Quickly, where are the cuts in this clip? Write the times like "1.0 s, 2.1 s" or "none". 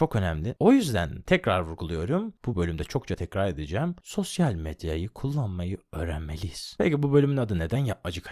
none